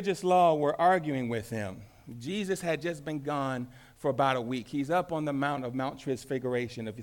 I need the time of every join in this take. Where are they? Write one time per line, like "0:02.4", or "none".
none